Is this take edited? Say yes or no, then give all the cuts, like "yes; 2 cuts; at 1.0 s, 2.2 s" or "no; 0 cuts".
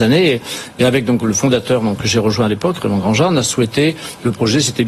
no; 0 cuts